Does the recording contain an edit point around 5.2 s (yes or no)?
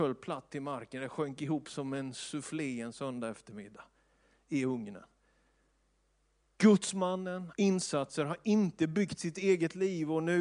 no